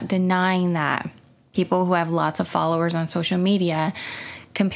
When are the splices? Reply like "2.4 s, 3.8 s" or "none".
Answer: none